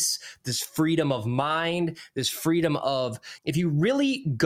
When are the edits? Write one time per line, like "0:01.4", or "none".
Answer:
0:03.4